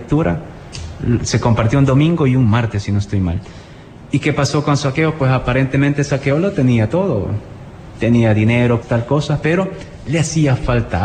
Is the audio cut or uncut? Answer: cut